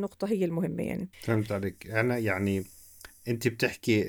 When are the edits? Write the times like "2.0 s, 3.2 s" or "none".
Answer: 1.1 s